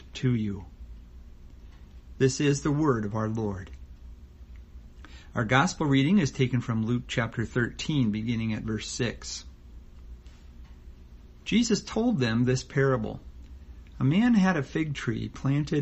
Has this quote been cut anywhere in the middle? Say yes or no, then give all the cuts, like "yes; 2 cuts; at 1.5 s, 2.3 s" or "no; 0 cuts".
no; 0 cuts